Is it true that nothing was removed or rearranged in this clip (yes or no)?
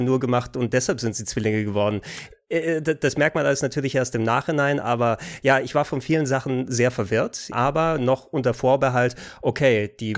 no